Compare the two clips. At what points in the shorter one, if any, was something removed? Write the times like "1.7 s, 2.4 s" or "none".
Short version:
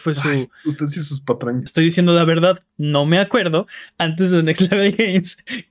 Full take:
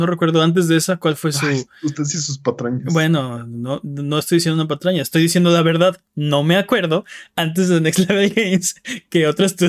1.7 s